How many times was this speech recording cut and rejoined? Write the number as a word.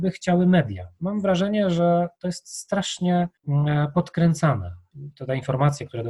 one